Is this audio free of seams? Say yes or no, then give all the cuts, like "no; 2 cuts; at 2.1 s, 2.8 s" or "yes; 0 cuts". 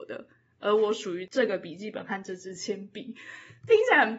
yes; 0 cuts